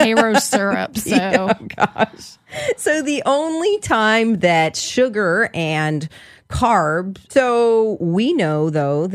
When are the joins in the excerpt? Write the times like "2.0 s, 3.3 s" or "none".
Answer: 7.3 s